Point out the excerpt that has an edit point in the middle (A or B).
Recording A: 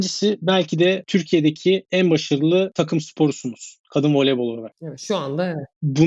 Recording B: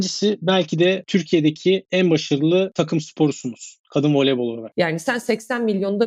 B